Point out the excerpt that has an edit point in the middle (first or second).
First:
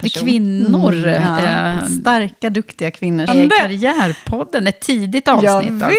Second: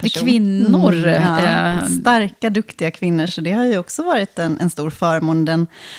first